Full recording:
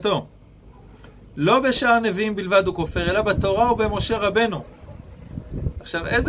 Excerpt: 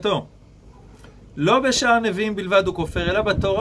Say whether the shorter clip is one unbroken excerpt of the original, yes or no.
yes